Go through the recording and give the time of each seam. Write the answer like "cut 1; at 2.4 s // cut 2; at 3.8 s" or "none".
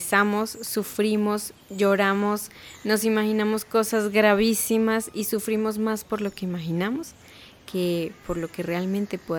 none